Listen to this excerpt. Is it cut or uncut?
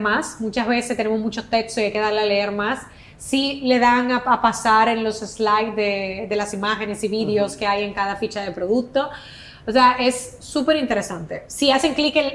uncut